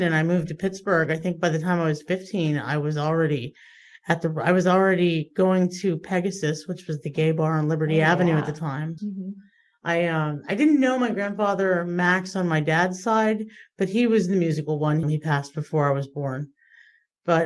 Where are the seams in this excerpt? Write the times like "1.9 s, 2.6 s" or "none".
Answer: 9.0 s, 15.0 s